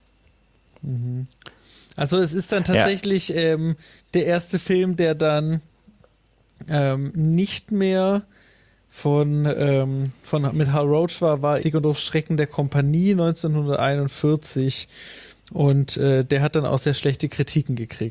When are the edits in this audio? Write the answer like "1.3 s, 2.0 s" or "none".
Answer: 11.6 s